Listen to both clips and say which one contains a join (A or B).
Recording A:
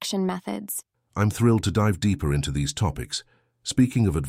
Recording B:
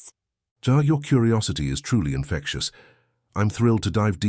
A